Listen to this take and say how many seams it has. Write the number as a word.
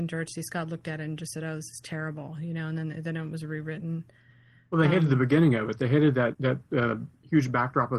one